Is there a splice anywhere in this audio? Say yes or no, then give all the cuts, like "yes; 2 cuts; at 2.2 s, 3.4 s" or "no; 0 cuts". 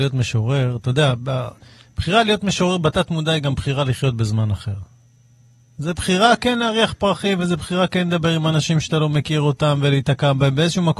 no; 0 cuts